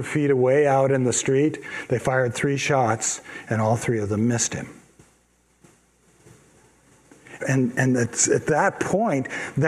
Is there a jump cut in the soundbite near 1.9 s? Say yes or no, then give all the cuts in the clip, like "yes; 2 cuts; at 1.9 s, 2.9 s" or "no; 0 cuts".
no; 1 cut; at 7.4 s